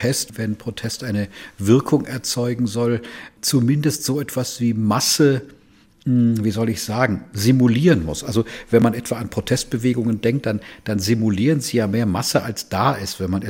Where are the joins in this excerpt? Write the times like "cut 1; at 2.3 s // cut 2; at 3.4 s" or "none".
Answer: none